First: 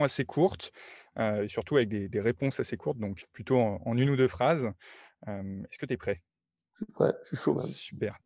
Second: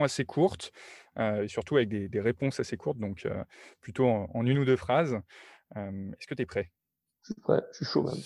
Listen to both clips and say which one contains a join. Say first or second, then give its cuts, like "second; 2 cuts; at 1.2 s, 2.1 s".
first; 1 cut; at 3.2 s